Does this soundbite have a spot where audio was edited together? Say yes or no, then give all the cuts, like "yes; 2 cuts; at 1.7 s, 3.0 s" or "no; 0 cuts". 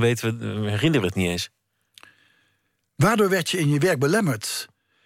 no; 0 cuts